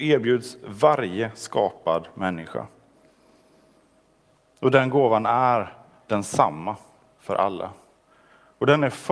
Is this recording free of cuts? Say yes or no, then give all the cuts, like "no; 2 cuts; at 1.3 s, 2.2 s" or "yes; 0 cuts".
yes; 0 cuts